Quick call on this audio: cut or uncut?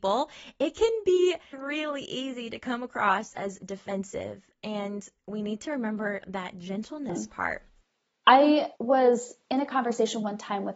cut